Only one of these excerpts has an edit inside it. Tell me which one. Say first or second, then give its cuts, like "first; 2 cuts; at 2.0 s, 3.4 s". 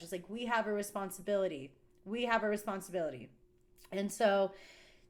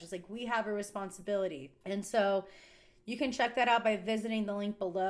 second; 1 cut; at 1.8 s